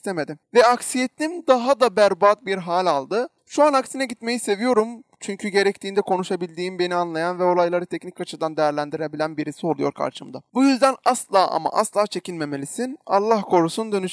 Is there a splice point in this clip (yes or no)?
no